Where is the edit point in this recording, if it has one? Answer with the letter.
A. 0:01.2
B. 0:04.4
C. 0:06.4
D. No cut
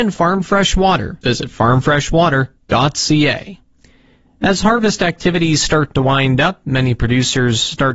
A